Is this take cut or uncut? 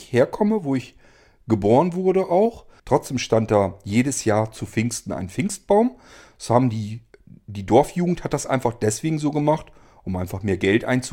cut